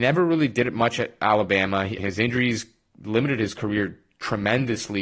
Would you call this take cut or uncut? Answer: cut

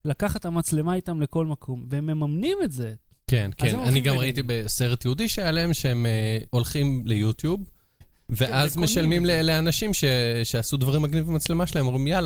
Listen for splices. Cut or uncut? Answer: cut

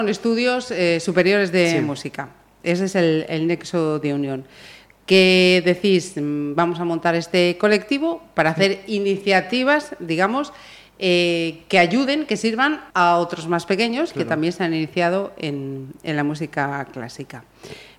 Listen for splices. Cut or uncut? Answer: cut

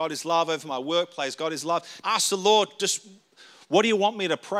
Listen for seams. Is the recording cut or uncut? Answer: cut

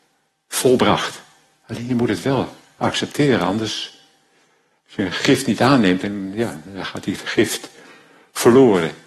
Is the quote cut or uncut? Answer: uncut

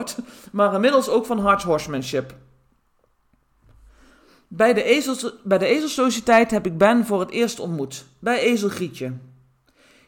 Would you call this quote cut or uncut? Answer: uncut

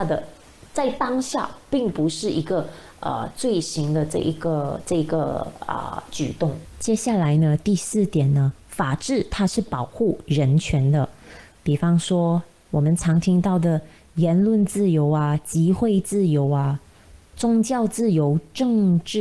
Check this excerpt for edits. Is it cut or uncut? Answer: uncut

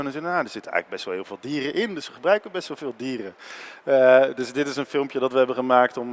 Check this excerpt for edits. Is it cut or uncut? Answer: uncut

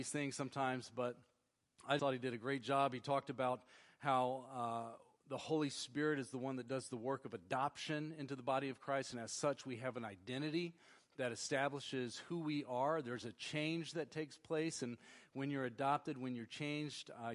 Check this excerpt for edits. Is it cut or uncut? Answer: cut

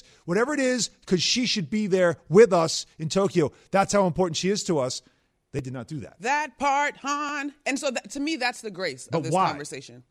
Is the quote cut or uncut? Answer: uncut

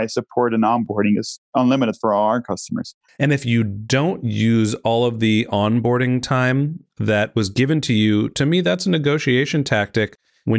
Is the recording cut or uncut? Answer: cut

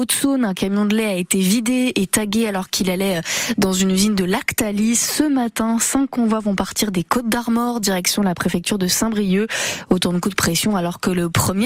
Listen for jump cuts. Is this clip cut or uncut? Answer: uncut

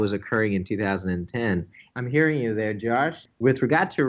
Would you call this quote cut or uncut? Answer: cut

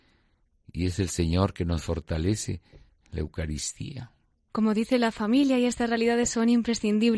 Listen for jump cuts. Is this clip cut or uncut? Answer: cut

